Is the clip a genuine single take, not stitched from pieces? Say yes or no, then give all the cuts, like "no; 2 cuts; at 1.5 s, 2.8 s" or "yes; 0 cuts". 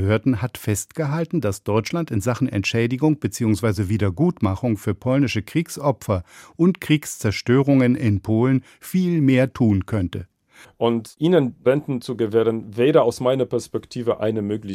no; 1 cut; at 10.6 s